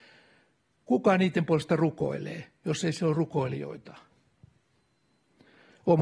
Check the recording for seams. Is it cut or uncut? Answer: uncut